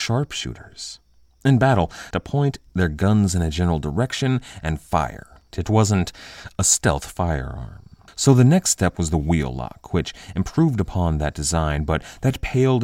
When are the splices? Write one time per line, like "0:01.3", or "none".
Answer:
0:02.1
0:05.5